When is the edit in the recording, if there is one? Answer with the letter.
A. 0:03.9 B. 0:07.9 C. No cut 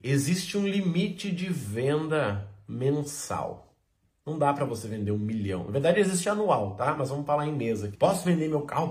B